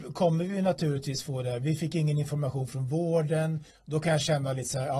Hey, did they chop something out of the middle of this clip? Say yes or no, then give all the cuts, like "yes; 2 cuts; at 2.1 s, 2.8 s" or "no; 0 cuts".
yes; 1 cut; at 3.7 s